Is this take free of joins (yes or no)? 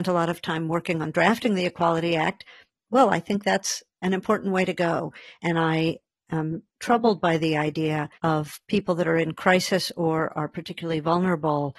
no